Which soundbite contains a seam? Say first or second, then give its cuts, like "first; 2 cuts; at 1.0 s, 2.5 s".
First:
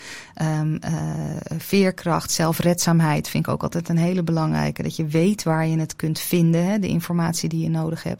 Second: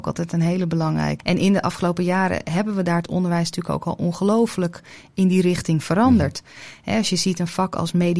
second; 1 cut; at 1.2 s